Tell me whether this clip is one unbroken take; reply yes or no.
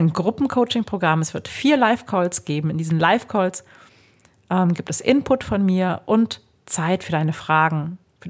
yes